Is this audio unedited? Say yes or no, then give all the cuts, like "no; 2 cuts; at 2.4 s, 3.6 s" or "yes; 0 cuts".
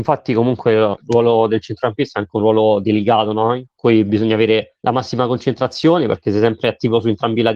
no; 1 cut; at 4.8 s